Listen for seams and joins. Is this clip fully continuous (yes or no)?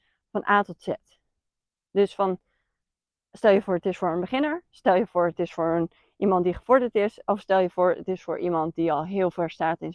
yes